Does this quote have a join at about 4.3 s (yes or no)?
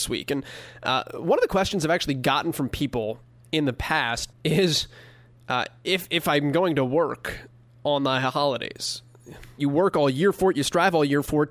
yes